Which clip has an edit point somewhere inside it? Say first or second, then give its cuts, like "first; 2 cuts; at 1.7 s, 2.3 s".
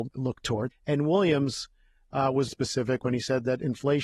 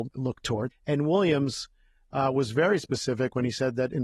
first; 1 cut; at 2.5 s